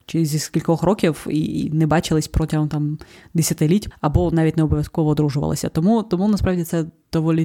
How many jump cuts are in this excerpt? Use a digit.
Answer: 1